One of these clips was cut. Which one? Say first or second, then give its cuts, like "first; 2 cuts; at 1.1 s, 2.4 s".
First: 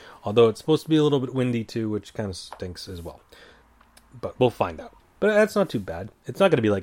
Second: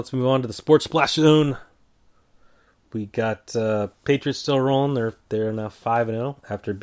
first; 1 cut; at 5.0 s